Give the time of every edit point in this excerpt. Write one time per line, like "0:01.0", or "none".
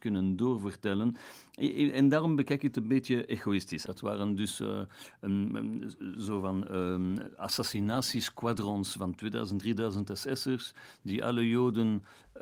0:03.9